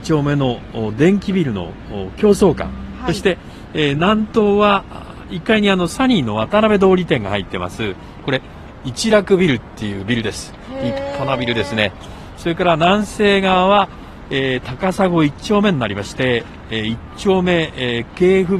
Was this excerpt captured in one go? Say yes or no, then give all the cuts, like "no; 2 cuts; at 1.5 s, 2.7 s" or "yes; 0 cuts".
yes; 0 cuts